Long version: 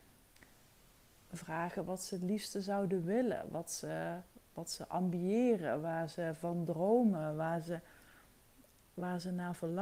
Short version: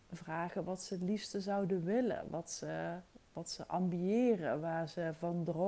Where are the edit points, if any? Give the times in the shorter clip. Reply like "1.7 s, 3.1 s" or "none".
none